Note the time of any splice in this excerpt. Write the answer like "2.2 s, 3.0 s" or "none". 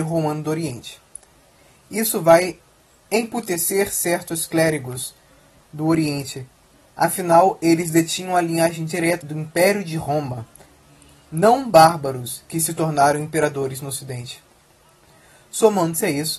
9.2 s

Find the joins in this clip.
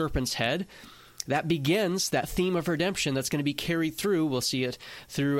none

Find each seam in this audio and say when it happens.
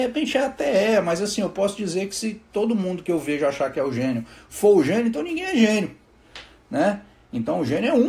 none

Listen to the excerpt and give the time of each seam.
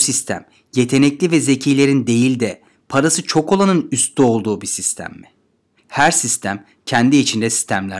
5.8 s

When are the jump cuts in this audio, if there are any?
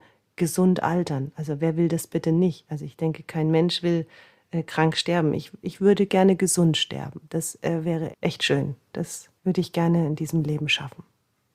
8.1 s, 9.4 s

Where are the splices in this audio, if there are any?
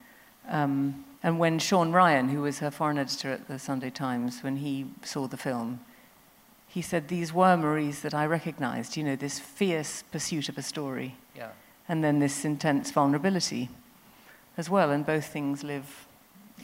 1.2 s

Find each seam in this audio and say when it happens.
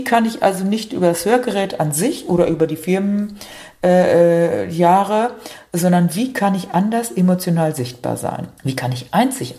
8.6 s

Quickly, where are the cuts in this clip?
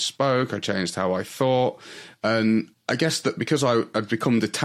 2.2 s

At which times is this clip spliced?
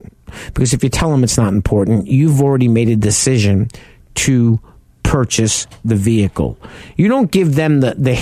6.9 s

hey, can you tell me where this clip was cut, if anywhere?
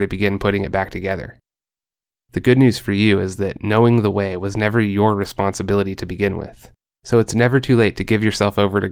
2.1 s, 7.0 s

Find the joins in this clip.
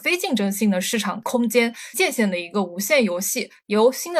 1.9 s

